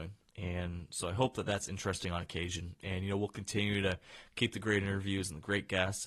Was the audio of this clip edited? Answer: no; 0 cuts

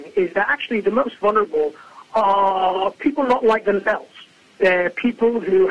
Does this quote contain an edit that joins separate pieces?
no; 0 cuts

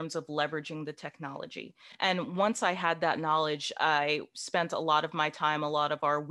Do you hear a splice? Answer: no; 0 cuts

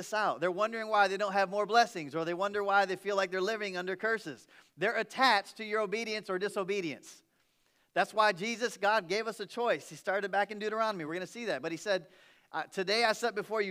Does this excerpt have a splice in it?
no; 0 cuts

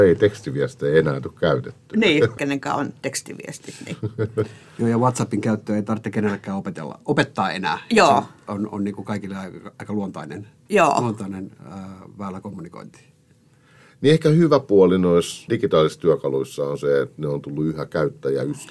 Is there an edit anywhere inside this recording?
yes; 2 cuts; at 2.4 s, 15.5 s

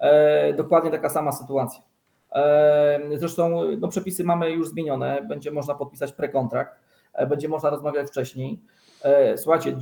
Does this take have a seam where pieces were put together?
no; 0 cuts

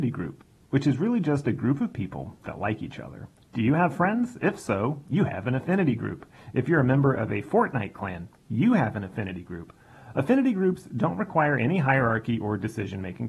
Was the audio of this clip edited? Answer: no; 0 cuts

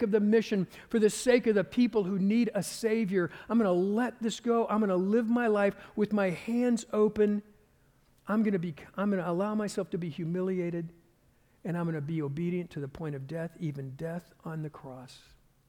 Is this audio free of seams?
yes; 0 cuts

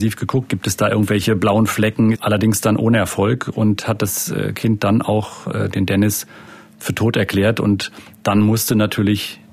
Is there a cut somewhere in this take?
yes; 1 cut; at 2.1 s

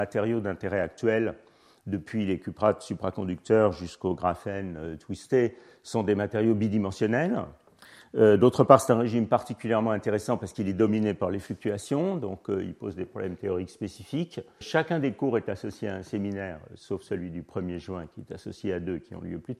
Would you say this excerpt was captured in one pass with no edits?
no; 1 cut; at 14.6 s

